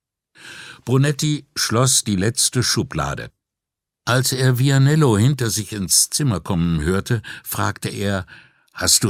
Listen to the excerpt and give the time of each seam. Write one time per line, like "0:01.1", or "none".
0:03.9

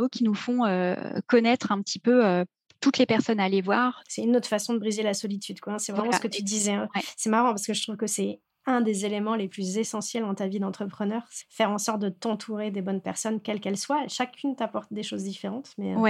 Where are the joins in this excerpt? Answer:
0:11.4

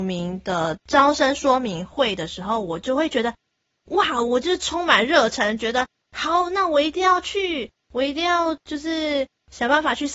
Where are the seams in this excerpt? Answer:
none

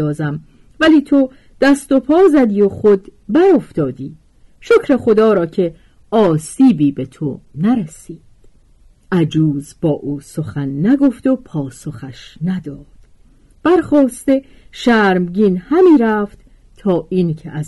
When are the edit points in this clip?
none

